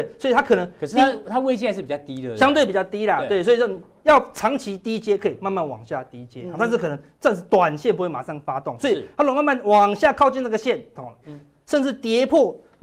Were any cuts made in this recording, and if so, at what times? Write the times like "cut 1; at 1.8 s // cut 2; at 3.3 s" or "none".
cut 1; at 11.2 s